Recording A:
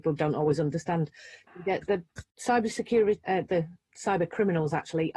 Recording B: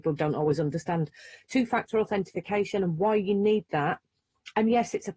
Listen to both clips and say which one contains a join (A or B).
A